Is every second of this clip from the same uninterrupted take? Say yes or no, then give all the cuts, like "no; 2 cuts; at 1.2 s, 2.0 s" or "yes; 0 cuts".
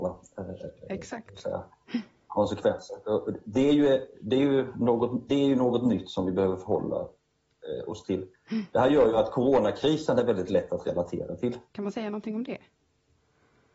no; 2 cuts; at 5.3 s, 11.7 s